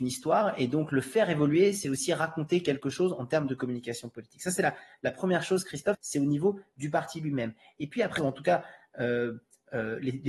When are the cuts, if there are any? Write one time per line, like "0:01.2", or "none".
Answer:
0:05.9
0:08.2